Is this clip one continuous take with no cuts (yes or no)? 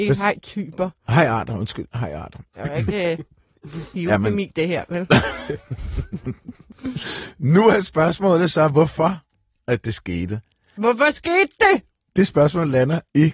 yes